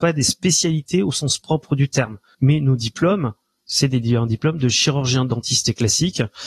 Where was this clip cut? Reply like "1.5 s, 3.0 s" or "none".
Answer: 2.3 s